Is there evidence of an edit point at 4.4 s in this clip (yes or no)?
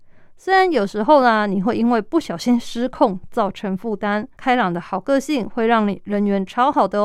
yes